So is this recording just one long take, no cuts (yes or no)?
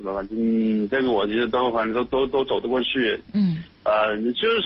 yes